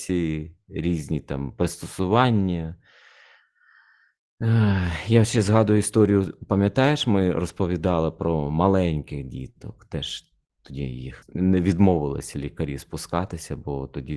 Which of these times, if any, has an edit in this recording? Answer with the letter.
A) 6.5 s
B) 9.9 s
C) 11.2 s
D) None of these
C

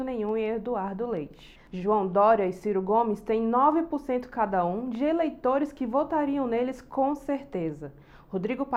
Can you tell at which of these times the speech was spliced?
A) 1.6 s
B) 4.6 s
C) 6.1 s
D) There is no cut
A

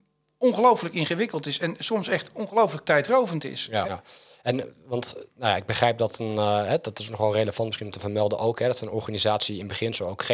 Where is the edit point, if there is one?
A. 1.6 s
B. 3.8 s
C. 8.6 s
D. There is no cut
B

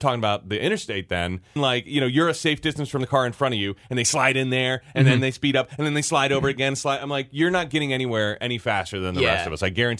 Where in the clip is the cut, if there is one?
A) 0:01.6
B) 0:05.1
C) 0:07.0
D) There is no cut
A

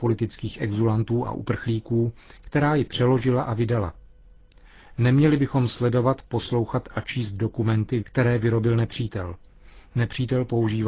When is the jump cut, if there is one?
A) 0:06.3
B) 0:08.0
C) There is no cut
B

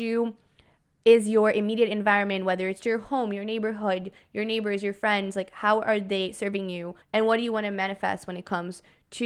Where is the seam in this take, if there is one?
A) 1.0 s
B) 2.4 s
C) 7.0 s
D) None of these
C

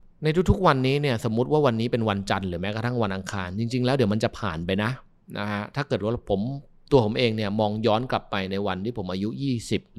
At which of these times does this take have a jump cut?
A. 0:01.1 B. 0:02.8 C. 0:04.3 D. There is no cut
D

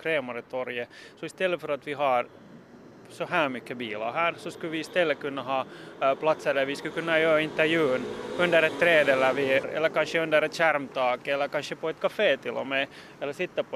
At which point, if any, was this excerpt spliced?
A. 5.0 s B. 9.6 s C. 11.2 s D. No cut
B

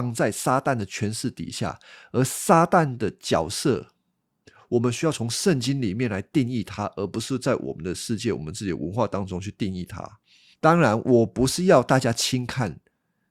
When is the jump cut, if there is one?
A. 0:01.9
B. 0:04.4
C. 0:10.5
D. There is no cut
C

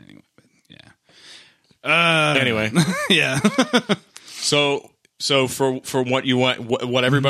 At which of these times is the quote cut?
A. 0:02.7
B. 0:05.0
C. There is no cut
C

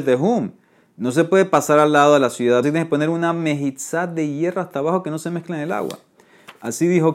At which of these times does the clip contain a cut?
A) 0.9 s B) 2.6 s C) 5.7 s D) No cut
B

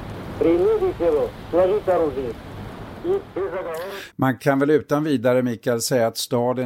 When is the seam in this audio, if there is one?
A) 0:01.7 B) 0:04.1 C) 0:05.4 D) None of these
B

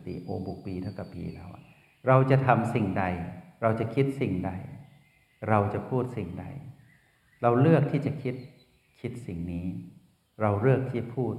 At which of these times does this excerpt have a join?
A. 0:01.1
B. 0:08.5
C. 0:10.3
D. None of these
A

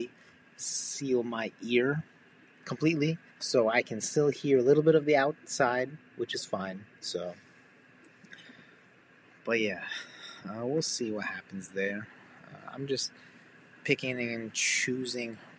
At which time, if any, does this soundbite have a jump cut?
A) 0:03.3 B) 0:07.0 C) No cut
A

